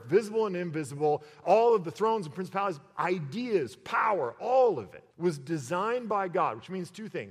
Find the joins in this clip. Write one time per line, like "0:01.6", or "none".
0:01.4
0:05.1

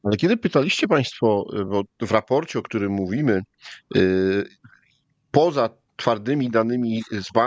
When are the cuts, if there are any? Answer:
none

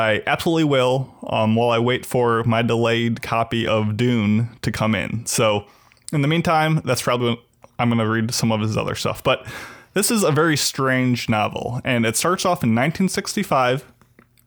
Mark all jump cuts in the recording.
none

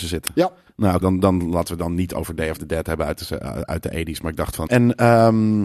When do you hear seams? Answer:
0:01.0
0:04.7

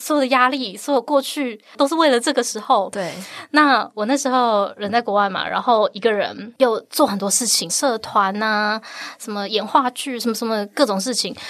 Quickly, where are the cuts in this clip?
0:07.7

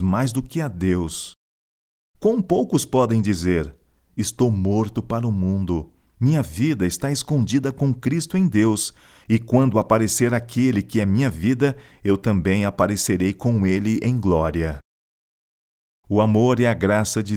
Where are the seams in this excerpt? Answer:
none

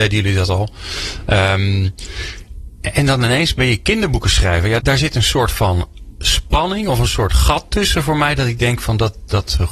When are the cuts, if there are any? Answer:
0:04.8

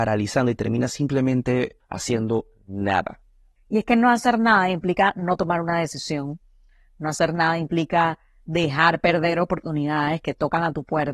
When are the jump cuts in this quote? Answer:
none

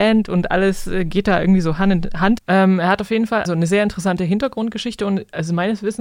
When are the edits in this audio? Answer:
0:02.4
0:03.4

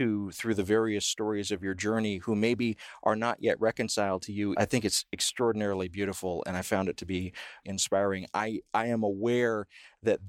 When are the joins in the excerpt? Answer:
0:04.5
0:07.6

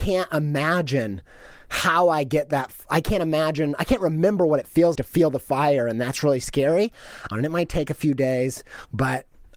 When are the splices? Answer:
0:05.0
0:07.3

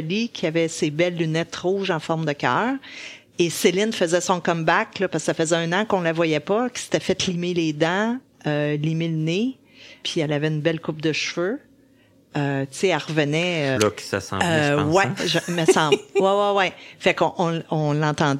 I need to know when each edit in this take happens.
0:10.0
0:13.7

